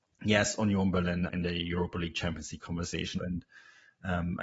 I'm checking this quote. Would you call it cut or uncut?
cut